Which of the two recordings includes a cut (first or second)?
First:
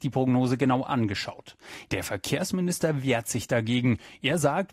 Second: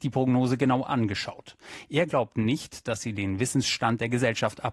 first